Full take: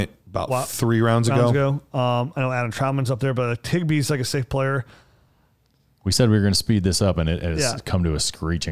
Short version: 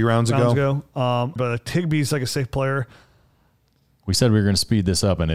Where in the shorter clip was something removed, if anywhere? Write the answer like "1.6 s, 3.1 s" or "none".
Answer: 1.4 s

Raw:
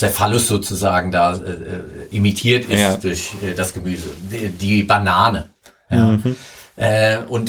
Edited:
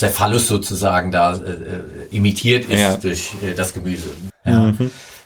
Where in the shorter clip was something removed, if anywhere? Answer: 4.3 s

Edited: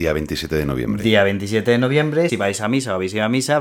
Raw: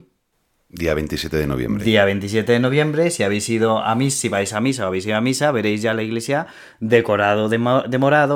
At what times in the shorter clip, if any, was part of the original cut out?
2.3 s

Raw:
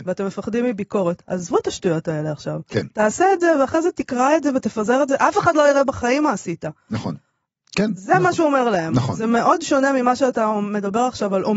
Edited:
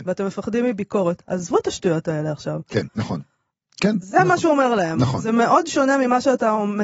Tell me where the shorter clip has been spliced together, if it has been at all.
2.9 s

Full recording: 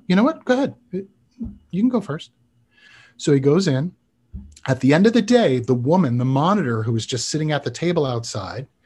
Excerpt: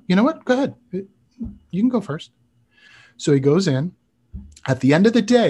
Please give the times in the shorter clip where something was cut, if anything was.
none

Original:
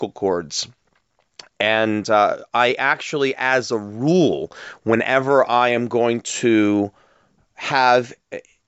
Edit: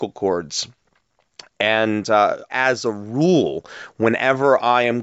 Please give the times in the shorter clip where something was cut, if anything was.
2.5 s

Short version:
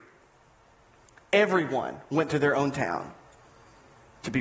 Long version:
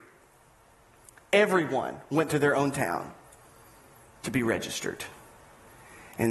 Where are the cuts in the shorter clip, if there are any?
none

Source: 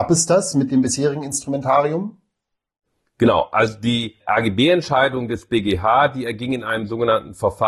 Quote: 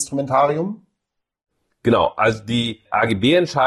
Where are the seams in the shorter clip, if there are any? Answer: none

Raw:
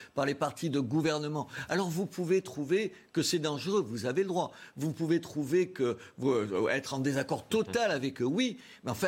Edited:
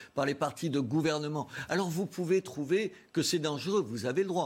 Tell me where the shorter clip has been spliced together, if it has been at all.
none

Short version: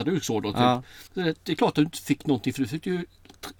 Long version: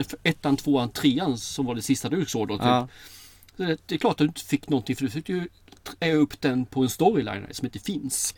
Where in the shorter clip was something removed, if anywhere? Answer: 1.1 s

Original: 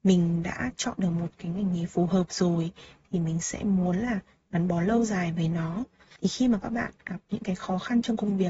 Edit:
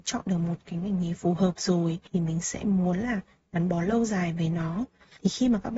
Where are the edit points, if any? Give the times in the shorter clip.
2.1 s

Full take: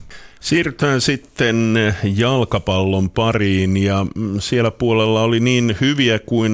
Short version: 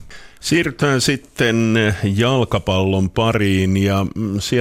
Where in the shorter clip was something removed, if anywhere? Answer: none

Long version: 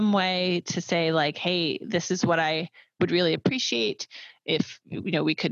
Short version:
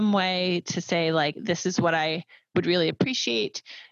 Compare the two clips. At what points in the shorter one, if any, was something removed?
1.3 s

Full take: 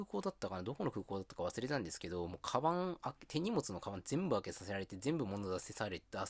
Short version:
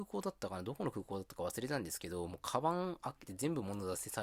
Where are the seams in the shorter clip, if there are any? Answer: 3.3 s

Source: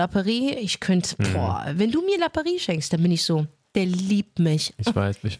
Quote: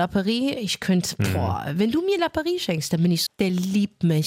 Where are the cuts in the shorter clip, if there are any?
3.3 s

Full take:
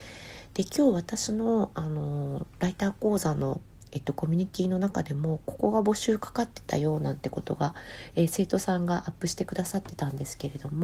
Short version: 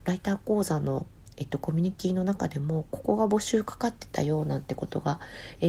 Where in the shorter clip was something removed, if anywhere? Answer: none

